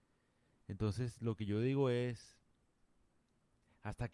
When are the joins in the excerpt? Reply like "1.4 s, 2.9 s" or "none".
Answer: none